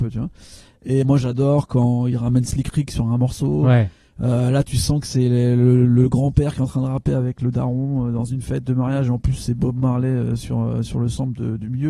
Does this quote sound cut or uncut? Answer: cut